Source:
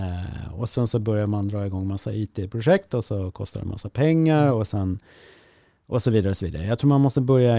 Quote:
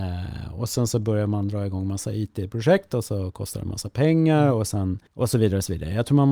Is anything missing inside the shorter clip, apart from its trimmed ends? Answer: yes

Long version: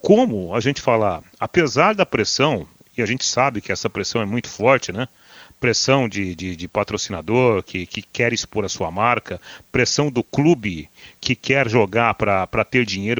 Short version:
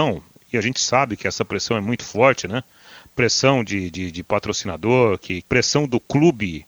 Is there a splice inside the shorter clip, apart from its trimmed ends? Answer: yes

